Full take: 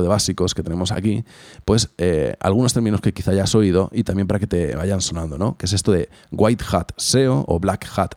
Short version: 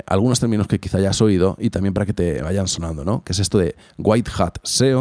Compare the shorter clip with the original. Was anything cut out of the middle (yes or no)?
no